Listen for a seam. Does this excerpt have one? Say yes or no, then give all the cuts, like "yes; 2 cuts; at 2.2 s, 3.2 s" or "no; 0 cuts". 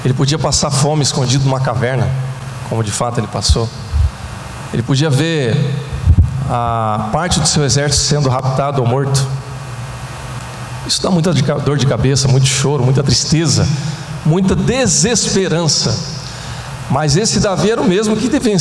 no; 0 cuts